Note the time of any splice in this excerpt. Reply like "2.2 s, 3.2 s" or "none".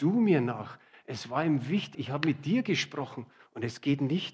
1.9 s